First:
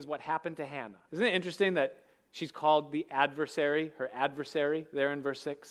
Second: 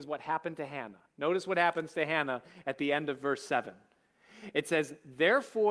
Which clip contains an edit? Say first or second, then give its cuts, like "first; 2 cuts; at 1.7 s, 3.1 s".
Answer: first; 1 cut; at 1.1 s